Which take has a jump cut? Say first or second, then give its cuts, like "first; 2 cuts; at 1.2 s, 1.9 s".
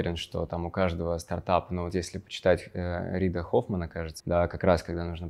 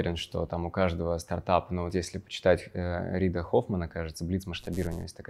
first; 1 cut; at 4.2 s